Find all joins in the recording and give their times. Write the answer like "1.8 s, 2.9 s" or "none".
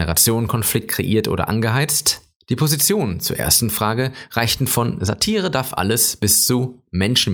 2.4 s